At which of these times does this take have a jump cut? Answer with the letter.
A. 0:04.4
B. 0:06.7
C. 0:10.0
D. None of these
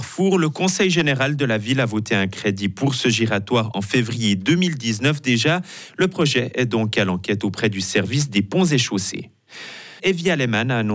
C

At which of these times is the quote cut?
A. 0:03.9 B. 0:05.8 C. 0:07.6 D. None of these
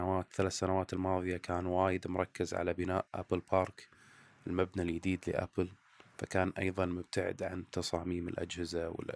D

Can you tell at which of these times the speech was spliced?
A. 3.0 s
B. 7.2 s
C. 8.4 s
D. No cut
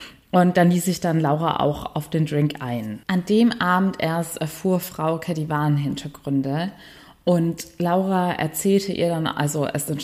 A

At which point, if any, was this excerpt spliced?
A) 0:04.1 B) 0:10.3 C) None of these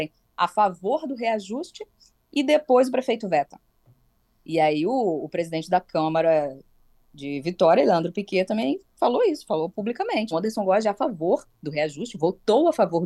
B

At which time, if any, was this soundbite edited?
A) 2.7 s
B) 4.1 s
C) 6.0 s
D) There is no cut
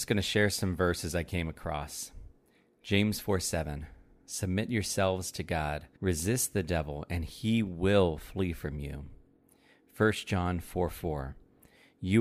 C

